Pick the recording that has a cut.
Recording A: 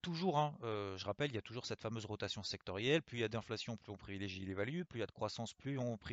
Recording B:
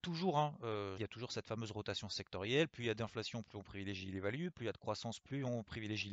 B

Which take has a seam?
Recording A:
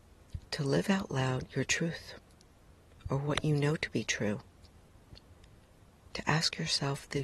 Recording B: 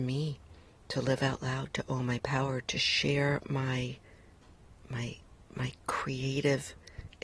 B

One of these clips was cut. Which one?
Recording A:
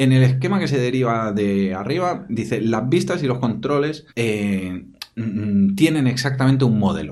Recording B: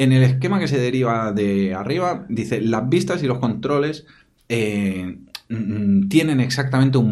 A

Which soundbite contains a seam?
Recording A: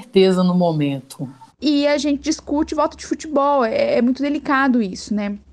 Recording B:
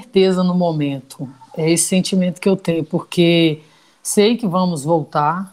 A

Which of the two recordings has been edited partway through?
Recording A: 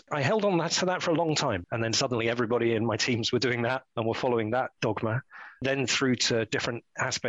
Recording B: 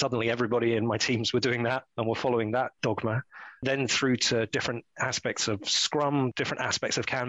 A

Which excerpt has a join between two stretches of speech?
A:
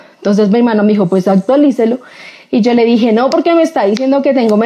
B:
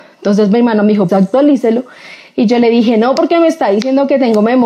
B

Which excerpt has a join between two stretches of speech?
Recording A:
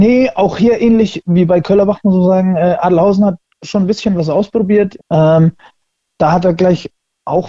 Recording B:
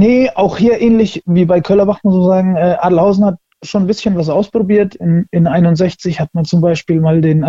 A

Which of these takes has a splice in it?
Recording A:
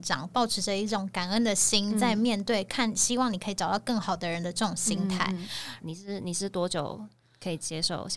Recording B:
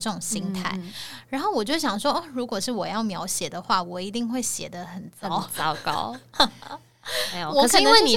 A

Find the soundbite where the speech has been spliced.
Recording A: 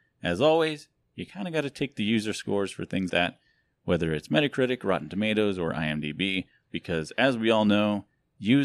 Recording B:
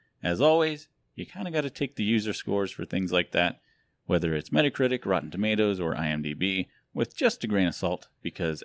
A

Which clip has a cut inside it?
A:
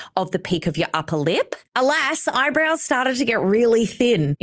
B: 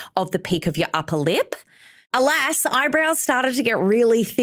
A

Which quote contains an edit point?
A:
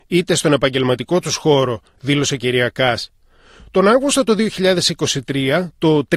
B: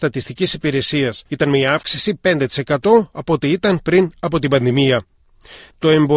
B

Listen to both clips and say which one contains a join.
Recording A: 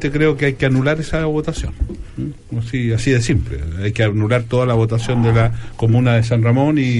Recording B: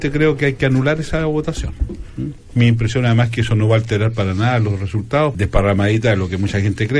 B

